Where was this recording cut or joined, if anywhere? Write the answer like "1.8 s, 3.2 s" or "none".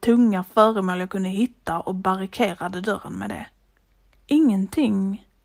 4.1 s